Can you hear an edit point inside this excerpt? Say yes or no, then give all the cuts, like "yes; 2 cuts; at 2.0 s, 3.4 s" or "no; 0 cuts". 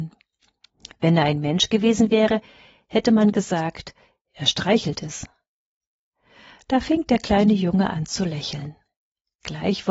no; 0 cuts